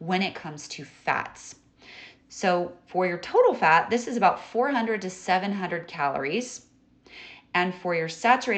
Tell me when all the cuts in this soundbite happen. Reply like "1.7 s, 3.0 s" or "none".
2.2 s